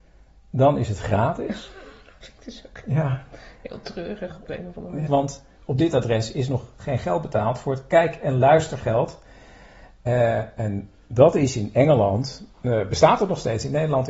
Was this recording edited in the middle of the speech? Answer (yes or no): yes